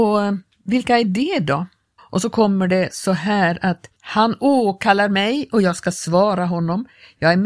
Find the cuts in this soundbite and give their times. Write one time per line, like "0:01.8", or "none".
0:02.0
0:04.0